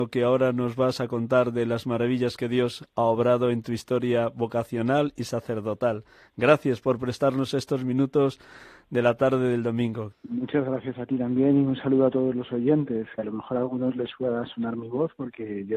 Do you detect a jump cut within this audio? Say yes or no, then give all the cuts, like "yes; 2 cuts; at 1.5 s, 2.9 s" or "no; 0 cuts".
yes; 2 cuts; at 10.1 s, 13.2 s